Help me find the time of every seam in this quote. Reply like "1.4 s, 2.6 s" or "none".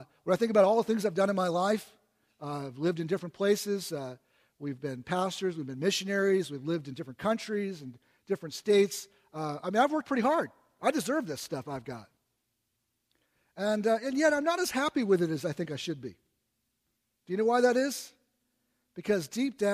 none